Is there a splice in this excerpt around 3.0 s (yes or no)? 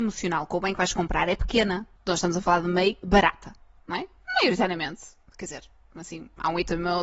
yes